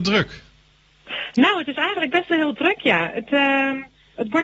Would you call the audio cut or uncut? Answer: uncut